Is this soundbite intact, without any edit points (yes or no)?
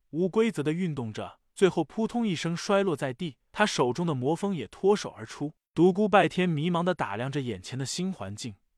yes